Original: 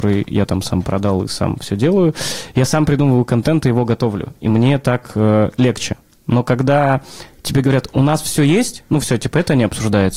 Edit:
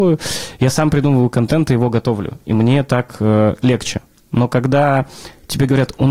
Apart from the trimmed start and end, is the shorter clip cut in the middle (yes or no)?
no